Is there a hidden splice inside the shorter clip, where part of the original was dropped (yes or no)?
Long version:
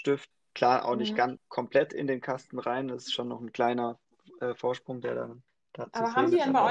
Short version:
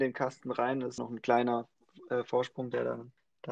yes